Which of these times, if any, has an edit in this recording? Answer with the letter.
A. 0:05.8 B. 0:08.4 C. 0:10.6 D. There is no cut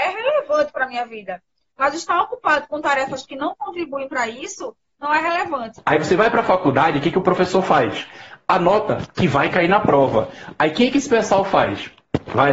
A